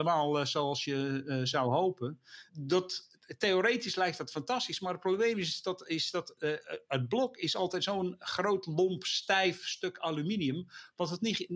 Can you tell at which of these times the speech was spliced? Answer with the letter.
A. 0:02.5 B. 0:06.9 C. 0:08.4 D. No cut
A